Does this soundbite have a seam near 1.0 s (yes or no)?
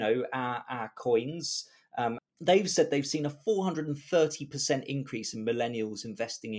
no